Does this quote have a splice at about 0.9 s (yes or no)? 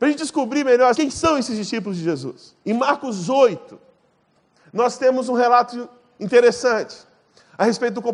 yes